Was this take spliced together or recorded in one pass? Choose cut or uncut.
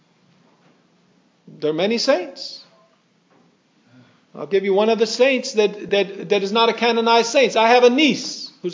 uncut